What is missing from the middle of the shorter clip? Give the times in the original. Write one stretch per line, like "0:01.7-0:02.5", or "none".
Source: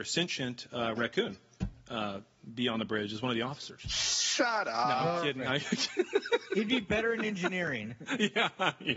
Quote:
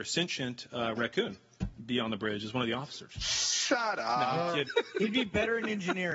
0:01.8-0:02.5
0:05.3-0:06.2